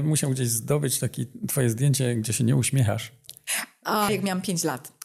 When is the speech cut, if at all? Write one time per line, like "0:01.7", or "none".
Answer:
0:04.1